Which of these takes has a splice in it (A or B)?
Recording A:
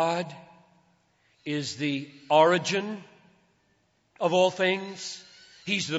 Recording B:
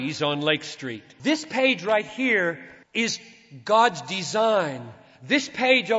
B